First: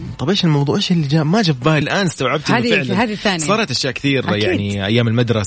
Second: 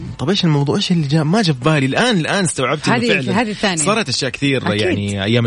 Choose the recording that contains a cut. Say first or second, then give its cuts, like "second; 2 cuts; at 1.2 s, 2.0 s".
first; 1 cut; at 1.8 s